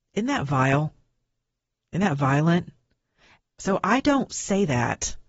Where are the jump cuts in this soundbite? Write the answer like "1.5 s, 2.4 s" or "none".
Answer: 3.4 s